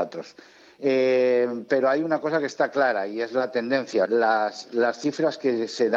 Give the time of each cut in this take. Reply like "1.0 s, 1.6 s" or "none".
1.7 s, 4.1 s